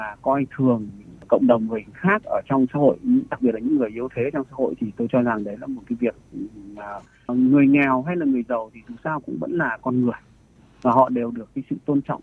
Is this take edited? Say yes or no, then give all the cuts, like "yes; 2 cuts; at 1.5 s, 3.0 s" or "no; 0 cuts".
yes; 1 cut; at 7.3 s